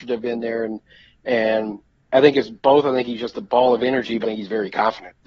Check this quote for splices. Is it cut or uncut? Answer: cut